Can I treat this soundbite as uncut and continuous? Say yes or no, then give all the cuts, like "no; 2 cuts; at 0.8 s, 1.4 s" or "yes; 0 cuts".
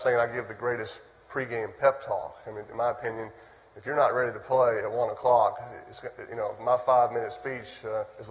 yes; 0 cuts